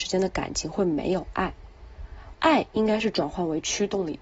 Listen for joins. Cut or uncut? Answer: cut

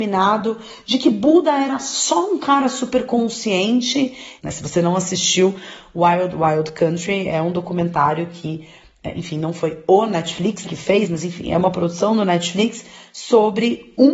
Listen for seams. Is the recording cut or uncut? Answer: cut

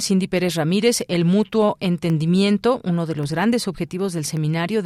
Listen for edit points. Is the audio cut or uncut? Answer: uncut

